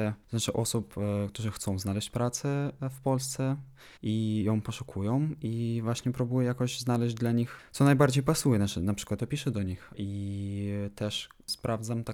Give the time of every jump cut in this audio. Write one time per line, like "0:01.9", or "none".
0:04.0
0:09.2